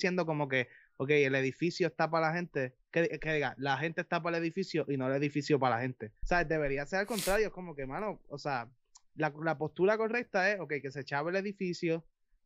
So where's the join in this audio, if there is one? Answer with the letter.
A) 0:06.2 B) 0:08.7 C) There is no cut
A